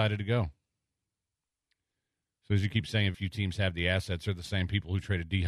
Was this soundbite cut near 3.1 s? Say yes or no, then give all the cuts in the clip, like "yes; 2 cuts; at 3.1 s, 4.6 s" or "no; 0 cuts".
yes; 1 cut; at 3.1 s